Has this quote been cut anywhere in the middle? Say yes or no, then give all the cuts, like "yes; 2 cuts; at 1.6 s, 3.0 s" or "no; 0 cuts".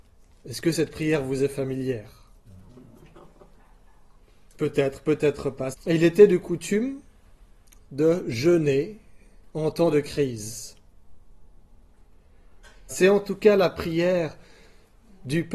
yes; 2 cuts; at 5.7 s, 12.9 s